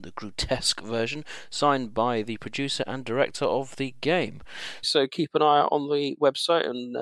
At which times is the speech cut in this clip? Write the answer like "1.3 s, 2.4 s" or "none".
4.8 s

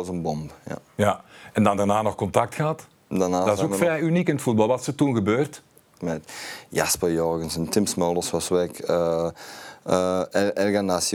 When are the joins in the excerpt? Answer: 6.0 s

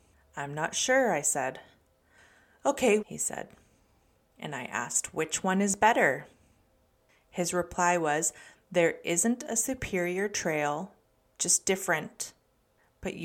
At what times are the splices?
3.0 s

